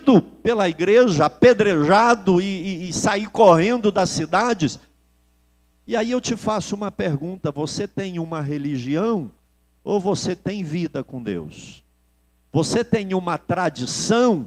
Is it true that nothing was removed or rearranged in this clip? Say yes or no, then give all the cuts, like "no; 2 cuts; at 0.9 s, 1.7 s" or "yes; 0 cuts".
no; 1 cut; at 5.7 s